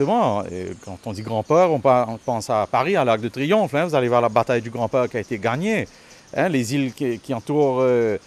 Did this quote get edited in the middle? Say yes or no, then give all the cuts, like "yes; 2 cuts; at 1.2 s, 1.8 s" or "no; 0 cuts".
no; 0 cuts